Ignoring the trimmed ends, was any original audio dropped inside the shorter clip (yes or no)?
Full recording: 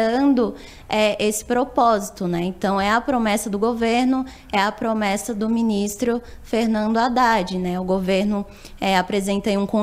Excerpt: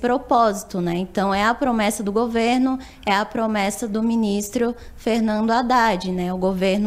no